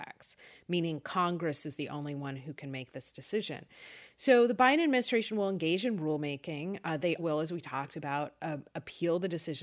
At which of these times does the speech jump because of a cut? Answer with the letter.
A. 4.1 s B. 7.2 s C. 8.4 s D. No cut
B